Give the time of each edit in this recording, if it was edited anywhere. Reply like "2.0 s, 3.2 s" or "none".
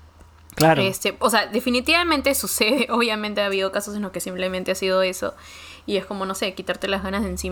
none